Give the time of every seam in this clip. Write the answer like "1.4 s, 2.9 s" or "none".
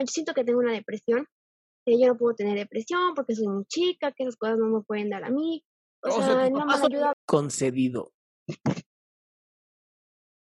7.1 s